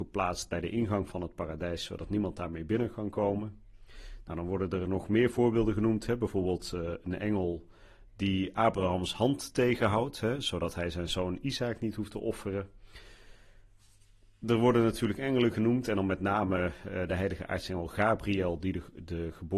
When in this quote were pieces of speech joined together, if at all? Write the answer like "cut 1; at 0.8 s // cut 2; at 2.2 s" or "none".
none